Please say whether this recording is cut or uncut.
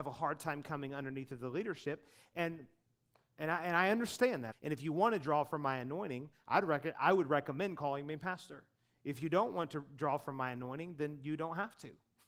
cut